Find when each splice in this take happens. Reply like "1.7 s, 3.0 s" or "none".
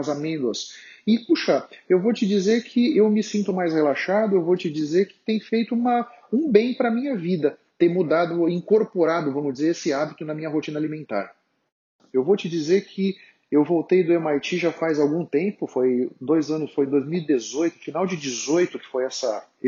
12.1 s

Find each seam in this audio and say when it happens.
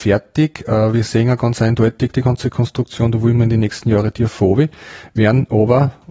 2.1 s

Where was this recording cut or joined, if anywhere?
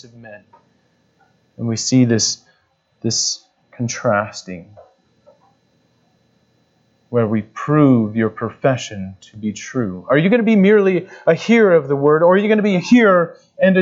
none

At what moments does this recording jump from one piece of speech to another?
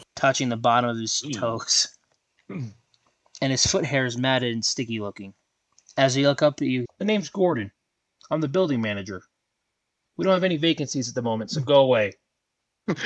6.8 s

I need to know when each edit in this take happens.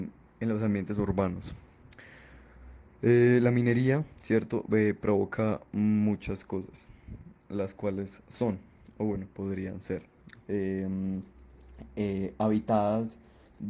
10.4 s

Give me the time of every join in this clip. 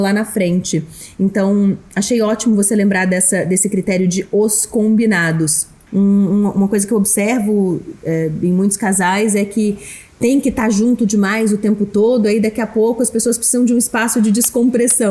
5.9 s, 10.1 s

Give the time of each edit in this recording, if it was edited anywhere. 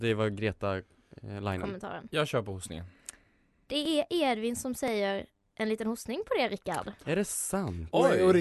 none

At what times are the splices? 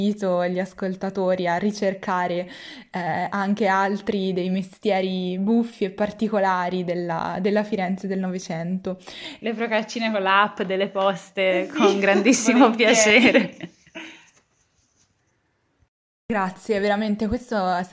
9.4 s

